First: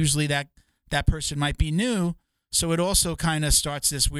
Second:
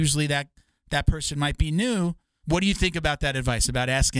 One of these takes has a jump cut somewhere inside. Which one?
second; 1 cut; at 2.4 s

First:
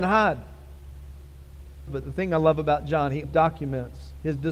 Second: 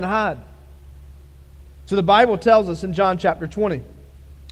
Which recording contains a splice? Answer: first; 2 cuts; at 1.9 s, 3.2 s

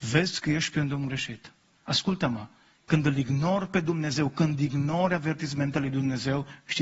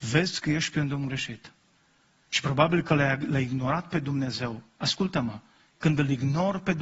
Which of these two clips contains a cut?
first; 1 cut; at 1.8 s

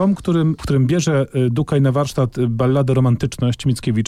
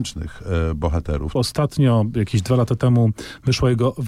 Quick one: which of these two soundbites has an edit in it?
second; 1 cut; at 1.4 s

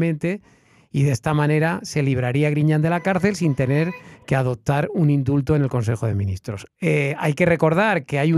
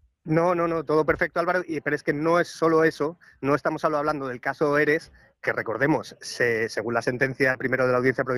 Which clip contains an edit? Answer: first; 1 cut; at 6.7 s

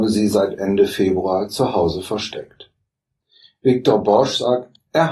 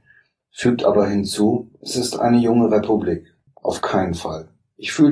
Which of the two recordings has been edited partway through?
second; 2 cuts; at 1.7 s, 3.5 s

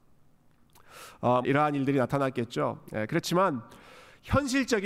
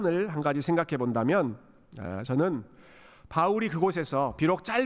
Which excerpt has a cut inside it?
first; 1 cut; at 1.4 s

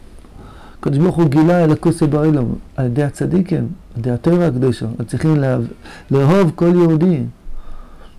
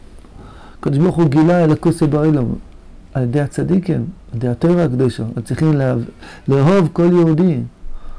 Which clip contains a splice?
first; 1 cut; at 2.7 s

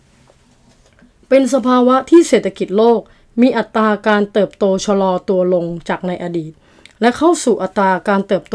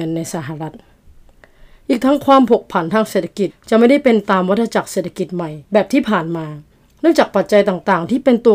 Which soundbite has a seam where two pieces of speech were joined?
second; 2 cuts; at 3.5 s, 5.6 s

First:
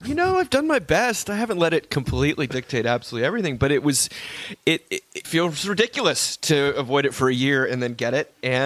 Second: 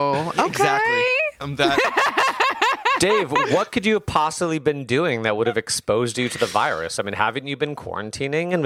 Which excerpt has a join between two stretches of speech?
first; 1 cut; at 5.2 s

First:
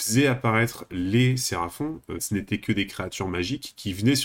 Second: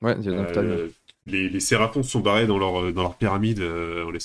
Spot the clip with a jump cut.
first; 1 cut; at 2.2 s

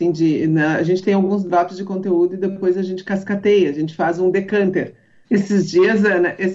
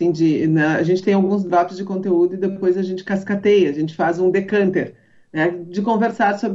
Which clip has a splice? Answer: first; 1 cut; at 5.2 s

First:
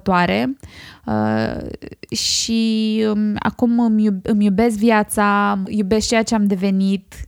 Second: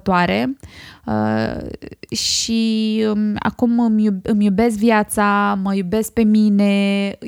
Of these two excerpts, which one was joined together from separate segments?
first; 1 cut; at 5.6 s

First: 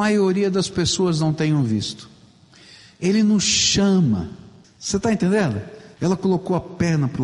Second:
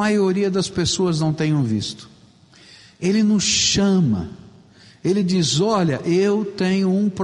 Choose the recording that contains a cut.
first; 2 cuts; at 4.6 s, 6.0 s

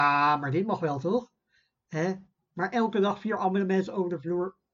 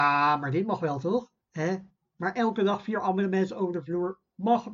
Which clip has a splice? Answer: second; 1 cut; at 1.4 s

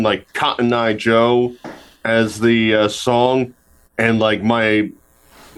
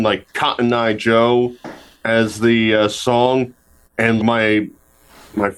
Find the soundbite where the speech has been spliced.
second; 1 cut; at 4.2 s

